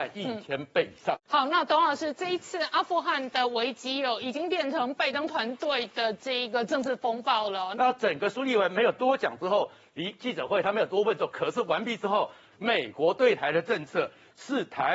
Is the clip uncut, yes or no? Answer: no